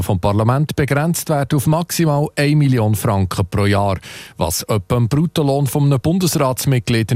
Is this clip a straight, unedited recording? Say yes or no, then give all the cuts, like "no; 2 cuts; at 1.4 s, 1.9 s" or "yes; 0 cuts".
yes; 0 cuts